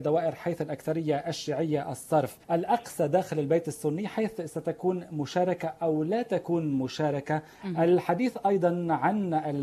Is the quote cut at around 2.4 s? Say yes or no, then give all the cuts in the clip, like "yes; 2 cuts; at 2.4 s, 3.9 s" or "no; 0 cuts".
yes; 1 cut; at 2.4 s